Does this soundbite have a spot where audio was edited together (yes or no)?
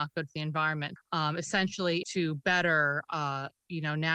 yes